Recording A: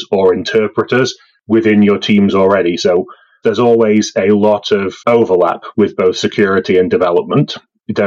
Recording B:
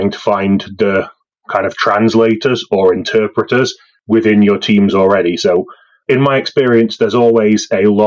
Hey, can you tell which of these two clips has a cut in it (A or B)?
A